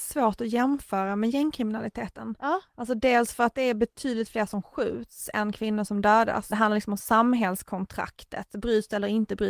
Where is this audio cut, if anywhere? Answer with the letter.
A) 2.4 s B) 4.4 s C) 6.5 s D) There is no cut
C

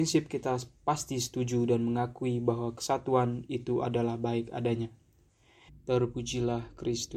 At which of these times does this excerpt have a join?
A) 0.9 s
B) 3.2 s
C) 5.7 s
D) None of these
C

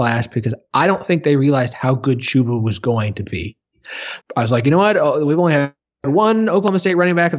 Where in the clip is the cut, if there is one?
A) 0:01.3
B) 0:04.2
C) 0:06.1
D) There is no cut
B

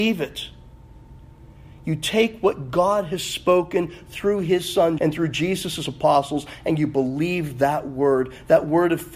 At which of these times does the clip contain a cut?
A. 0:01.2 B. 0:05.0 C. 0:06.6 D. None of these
B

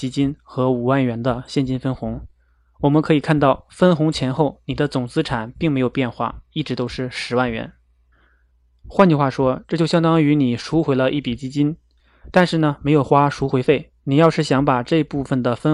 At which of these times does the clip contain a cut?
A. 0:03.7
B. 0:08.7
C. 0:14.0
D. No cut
C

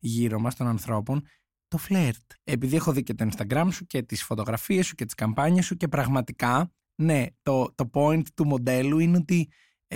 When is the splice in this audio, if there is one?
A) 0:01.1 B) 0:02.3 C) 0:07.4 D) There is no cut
B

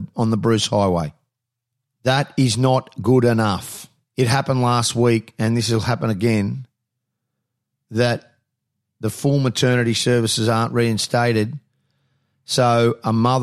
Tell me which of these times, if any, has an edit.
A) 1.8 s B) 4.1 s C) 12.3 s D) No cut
B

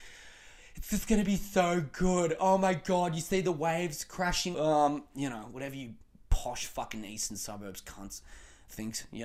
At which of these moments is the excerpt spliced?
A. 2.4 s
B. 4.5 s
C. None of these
B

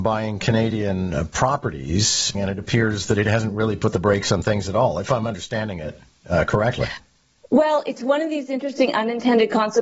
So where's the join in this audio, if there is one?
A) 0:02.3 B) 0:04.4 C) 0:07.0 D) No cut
A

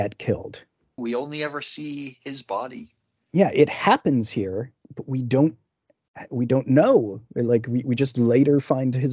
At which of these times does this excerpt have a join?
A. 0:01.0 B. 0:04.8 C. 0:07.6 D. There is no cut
A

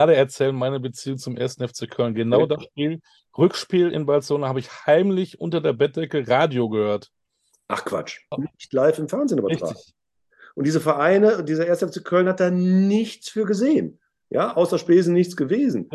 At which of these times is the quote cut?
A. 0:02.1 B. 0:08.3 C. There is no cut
B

